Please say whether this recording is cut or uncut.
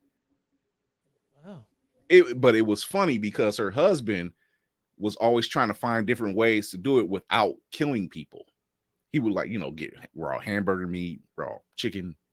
uncut